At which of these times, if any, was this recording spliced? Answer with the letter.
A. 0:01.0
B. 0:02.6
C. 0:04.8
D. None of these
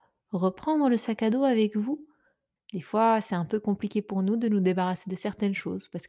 B